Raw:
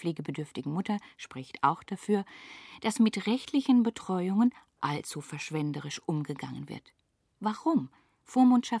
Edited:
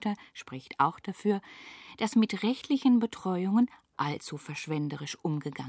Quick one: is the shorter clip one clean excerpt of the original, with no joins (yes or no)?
yes